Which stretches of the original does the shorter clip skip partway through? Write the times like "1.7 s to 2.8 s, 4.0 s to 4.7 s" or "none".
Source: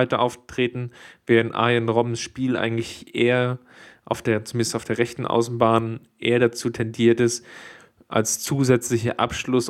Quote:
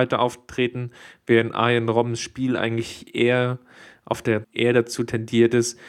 4.4 s to 6.1 s